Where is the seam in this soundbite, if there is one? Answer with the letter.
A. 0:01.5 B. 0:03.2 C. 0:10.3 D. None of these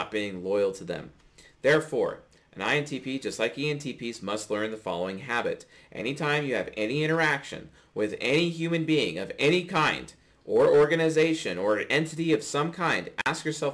D